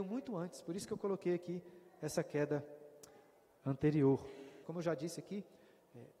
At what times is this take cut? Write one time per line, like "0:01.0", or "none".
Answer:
0:04.6